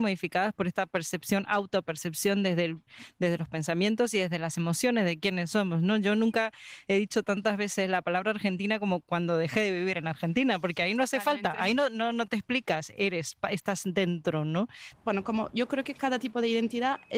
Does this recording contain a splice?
yes; 1 cut; at 14.9 s

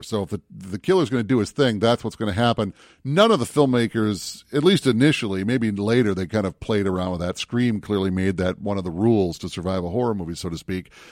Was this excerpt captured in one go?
yes; 0 cuts

